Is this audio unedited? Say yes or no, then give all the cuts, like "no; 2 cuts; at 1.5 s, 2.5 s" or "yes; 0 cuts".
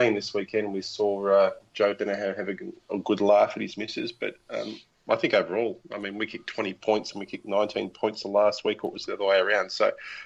yes; 0 cuts